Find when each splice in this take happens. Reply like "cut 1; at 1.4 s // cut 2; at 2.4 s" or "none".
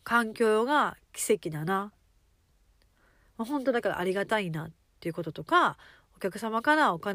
none